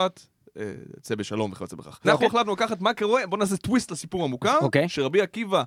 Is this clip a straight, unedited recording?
no; 1 cut; at 2.0 s

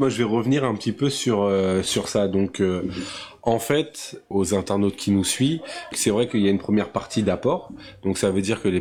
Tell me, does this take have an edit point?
yes; 2 cuts; at 4.3 s, 5.9 s

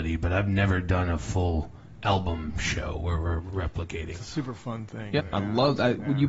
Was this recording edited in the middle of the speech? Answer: yes; 1 cut; at 5.2 s

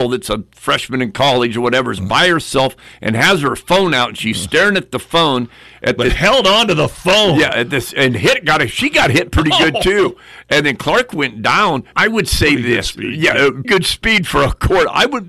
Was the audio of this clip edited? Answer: yes; 2 cuts; at 11.9 s, 13.6 s

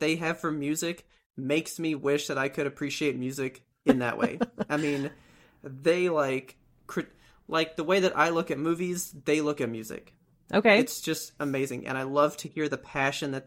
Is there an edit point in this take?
no; 0 cuts

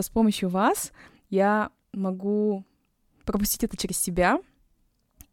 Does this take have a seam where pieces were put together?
no; 0 cuts

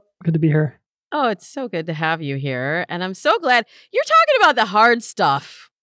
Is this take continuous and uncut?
yes; 0 cuts

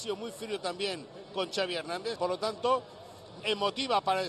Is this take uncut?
no; 2 cuts; at 2.2 s, 3.4 s

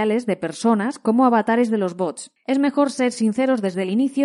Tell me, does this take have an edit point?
yes; 1 cut; at 2.4 s

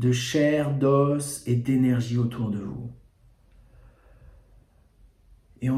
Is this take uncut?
yes; 0 cuts

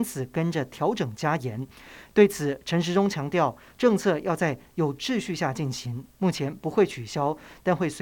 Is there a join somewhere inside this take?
no; 0 cuts

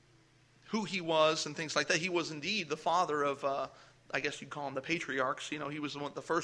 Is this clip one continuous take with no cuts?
yes; 0 cuts

